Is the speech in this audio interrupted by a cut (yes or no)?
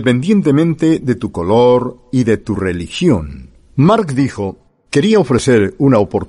no